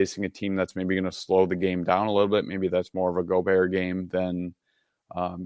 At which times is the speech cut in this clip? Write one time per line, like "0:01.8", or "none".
none